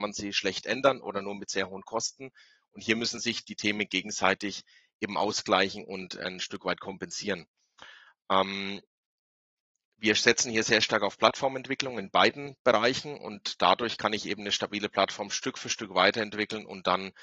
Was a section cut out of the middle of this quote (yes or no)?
no